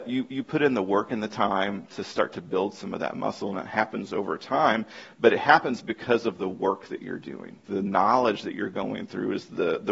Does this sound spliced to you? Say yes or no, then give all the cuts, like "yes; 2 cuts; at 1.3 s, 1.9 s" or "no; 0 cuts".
yes; 1 cut; at 7.6 s